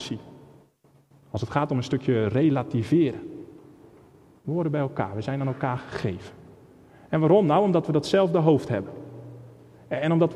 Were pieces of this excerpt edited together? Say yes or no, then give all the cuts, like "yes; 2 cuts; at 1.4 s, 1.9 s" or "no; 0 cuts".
no; 0 cuts